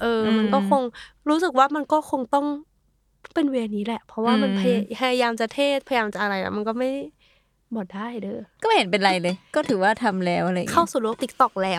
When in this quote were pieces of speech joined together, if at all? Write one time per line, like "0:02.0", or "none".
none